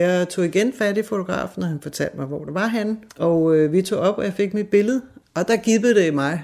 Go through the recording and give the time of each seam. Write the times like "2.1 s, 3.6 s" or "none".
3.1 s, 5.2 s